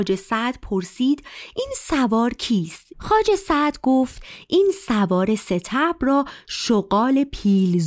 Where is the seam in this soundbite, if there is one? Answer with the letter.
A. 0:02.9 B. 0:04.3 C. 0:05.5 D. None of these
A